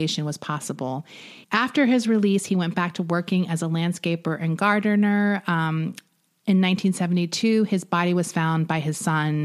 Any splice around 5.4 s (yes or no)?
no